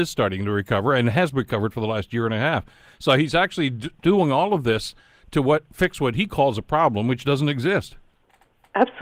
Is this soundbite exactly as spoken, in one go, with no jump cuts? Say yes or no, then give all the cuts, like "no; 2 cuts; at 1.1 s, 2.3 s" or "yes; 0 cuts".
yes; 0 cuts